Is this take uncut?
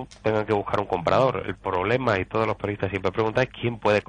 yes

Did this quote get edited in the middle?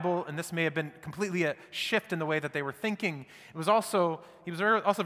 no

